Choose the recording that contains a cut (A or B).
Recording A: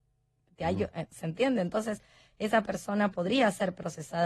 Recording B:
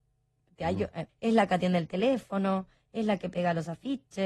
B